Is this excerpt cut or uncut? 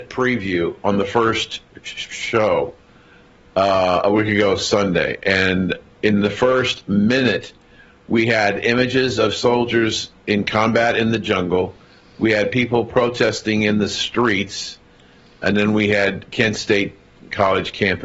uncut